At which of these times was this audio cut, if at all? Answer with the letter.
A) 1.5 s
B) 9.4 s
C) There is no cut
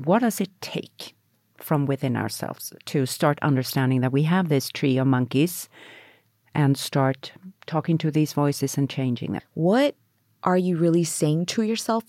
B